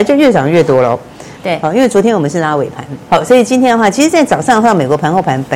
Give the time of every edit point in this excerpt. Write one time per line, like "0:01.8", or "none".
0:01.4
0:03.1